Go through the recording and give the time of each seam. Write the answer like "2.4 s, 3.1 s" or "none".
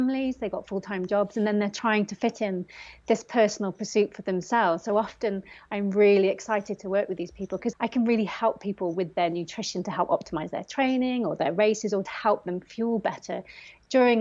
7.7 s, 12.1 s